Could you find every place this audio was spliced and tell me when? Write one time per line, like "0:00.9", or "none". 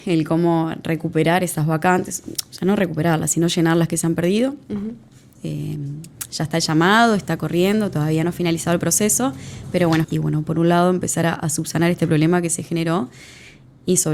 0:05.4
0:10.0